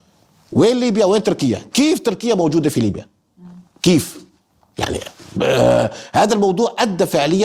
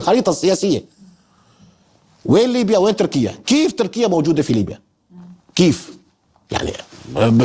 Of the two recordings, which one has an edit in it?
first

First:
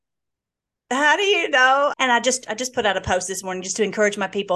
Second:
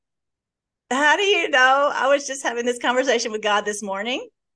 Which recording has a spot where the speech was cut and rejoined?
first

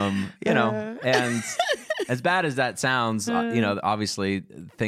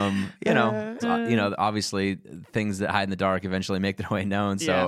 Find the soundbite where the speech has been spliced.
second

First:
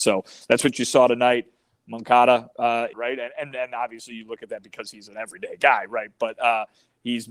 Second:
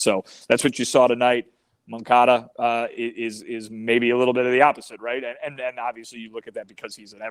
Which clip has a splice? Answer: first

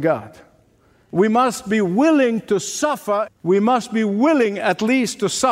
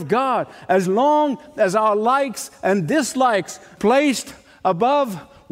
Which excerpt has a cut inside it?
first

